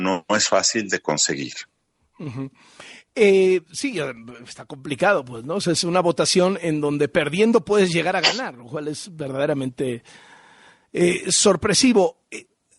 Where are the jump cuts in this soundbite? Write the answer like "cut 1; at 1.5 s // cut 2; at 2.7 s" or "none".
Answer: none